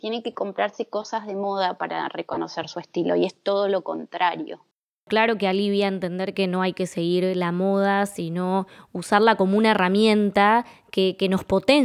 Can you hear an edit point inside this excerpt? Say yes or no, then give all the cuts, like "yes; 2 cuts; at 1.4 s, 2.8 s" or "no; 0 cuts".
no; 0 cuts